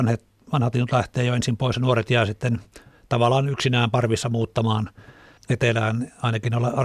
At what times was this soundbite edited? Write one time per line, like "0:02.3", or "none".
0:05.4